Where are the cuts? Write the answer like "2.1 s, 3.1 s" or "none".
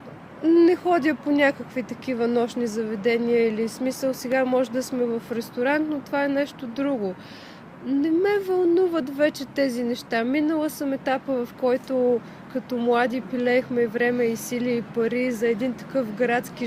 none